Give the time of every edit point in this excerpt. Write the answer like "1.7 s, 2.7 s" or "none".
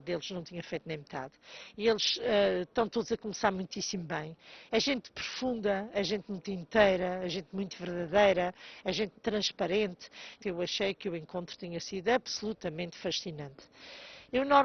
9.1 s, 10.4 s

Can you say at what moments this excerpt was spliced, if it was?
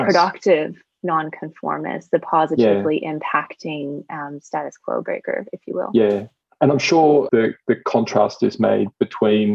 7.3 s

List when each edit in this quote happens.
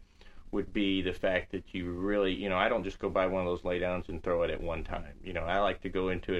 none

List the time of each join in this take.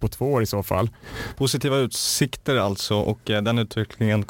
1.3 s

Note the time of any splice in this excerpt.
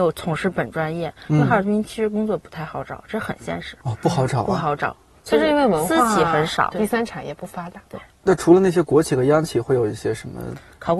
6.7 s

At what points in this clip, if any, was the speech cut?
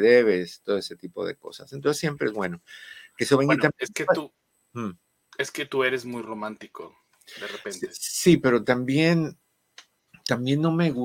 none

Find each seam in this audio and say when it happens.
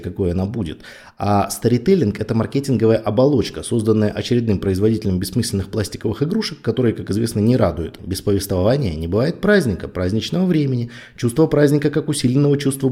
8.0 s

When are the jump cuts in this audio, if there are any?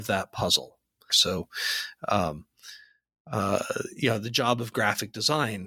1.1 s

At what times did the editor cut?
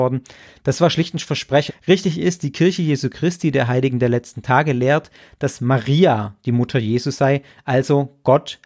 1.7 s

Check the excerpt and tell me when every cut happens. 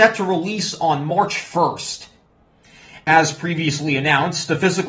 none

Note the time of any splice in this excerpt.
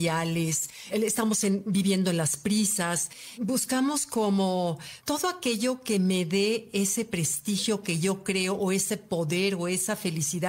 none

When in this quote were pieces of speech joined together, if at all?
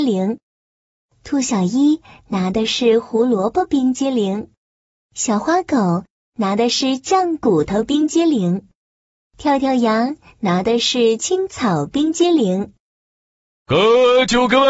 11.2 s

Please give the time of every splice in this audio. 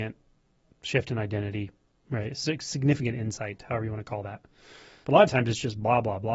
5.0 s

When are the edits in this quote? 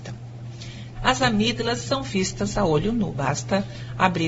0.9 s

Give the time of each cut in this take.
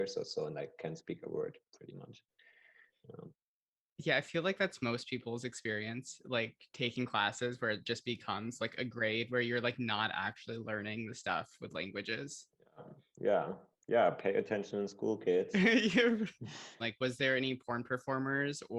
16.8 s

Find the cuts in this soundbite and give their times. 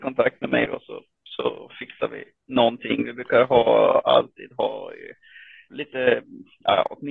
5.7 s

